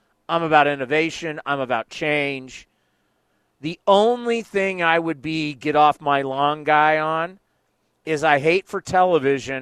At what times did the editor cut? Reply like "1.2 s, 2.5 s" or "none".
none